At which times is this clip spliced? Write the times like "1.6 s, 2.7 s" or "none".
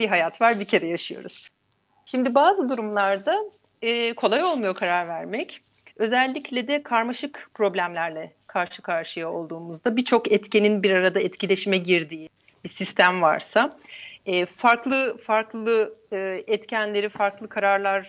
none